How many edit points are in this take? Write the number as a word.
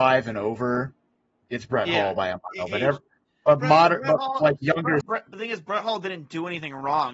one